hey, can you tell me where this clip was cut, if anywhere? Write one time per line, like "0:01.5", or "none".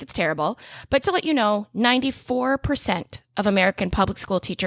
0:01.0